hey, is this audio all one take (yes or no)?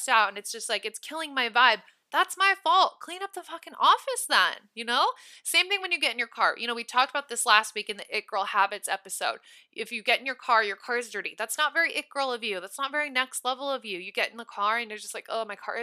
yes